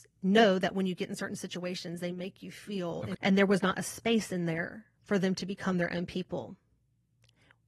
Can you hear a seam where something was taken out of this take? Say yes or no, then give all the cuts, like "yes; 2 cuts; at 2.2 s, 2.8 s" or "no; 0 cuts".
yes; 1 cut; at 3.1 s